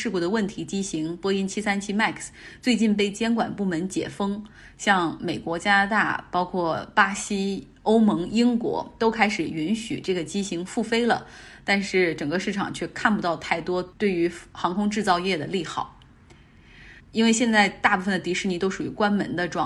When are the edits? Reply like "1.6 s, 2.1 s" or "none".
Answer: 17.0 s